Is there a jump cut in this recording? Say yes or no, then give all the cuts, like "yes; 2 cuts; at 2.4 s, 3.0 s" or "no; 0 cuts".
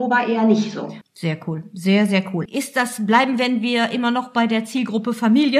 yes; 2 cuts; at 1.0 s, 2.5 s